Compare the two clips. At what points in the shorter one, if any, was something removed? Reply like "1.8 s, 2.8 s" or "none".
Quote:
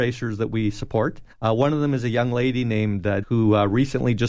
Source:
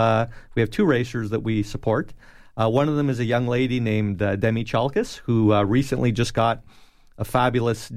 1.3 s, 3.2 s